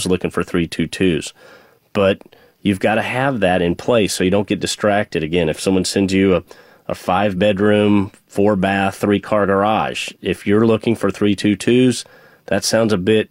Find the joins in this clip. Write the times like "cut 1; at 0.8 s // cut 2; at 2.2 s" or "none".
none